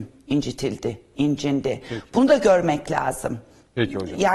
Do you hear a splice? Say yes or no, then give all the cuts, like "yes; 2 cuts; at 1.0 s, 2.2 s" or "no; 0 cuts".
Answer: no; 0 cuts